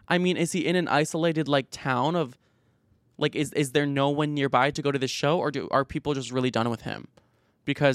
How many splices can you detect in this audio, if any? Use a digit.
0